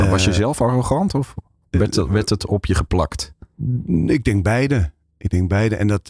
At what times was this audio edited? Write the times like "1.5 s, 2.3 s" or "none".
none

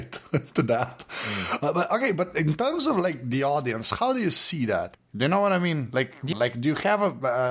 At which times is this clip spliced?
5.0 s, 6.3 s

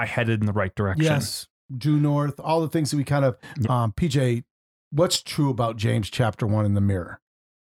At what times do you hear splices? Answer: 3.6 s

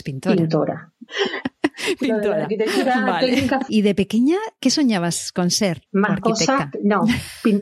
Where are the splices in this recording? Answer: 1.1 s, 3.7 s, 5.8 s

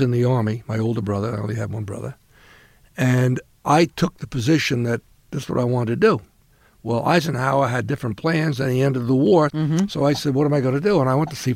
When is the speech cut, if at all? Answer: none

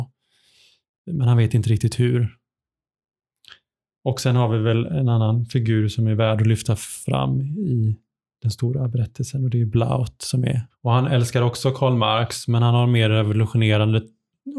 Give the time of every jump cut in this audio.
10.7 s

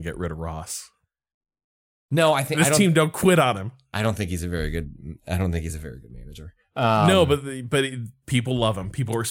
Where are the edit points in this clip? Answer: none

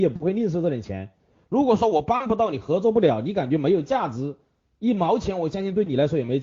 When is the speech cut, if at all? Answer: none

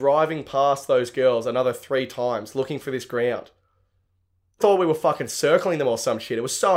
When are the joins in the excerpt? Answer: 4.6 s

